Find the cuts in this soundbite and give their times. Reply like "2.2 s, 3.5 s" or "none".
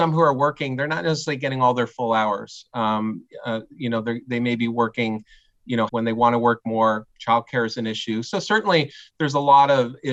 5.9 s

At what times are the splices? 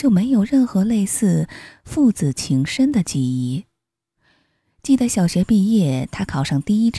none

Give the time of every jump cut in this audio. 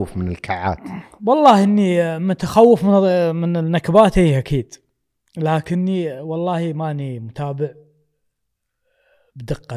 none

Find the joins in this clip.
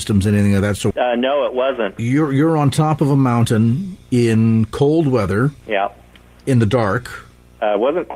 0.9 s, 2.0 s

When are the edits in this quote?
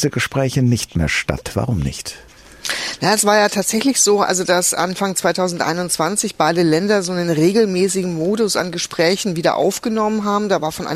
none

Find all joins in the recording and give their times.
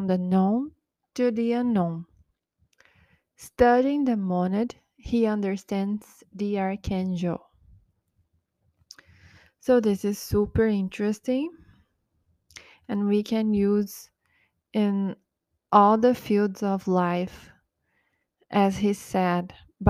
none

